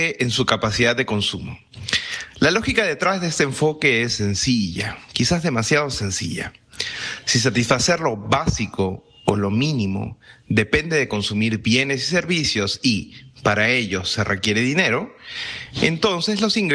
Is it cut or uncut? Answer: uncut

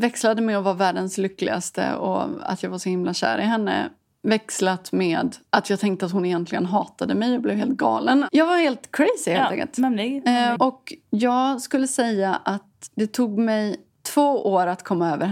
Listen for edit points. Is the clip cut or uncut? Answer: cut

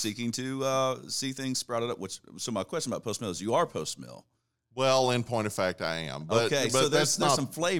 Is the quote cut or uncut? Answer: uncut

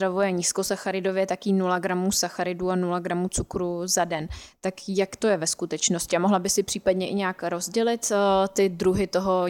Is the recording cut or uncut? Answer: uncut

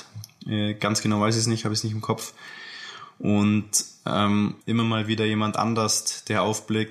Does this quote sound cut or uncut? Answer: cut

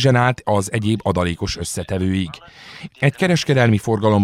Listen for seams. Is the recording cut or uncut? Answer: cut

